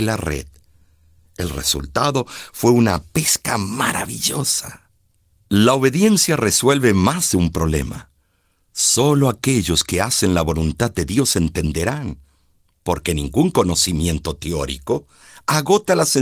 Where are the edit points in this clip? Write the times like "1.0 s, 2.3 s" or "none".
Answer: none